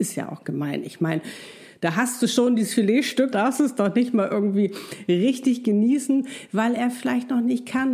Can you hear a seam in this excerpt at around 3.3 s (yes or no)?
yes